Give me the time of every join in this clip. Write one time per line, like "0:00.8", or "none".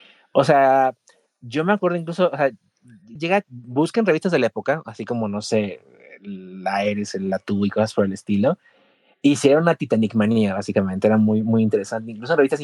0:03.2